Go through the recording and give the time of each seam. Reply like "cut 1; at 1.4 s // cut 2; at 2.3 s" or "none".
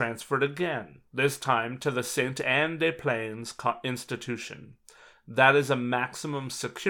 none